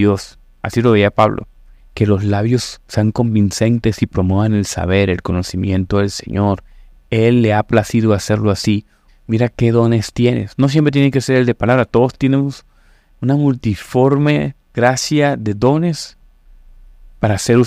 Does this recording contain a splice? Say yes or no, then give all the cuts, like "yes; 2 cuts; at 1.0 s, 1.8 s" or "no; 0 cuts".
yes; 3 cuts; at 1.8 s, 9.1 s, 14.6 s